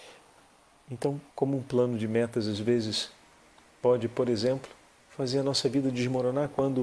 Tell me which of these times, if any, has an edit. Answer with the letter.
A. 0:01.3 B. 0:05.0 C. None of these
A